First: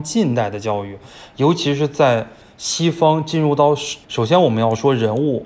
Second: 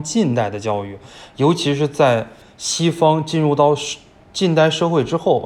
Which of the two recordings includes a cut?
first; 1 cut; at 4.0 s

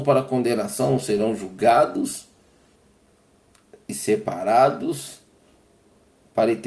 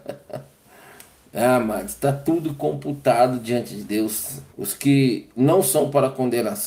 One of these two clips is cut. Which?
second; 1 cut; at 4.5 s

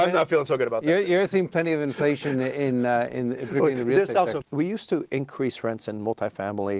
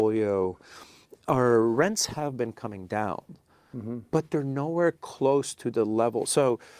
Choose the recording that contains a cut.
first; 1 cut; at 4.4 s

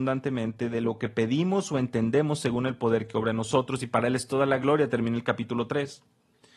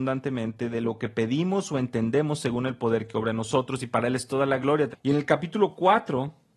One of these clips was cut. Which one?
second; 1 cut; at 4.9 s

